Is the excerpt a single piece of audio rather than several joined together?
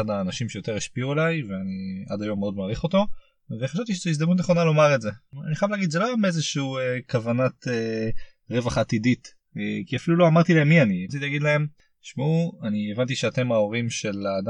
no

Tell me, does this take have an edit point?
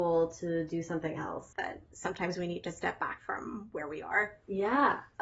yes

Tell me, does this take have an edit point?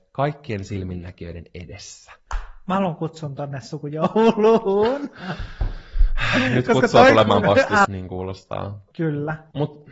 yes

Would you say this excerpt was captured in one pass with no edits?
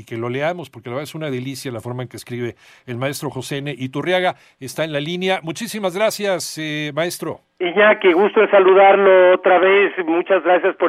yes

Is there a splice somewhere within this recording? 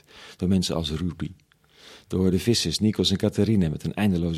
no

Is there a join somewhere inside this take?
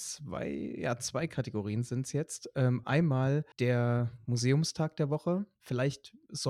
yes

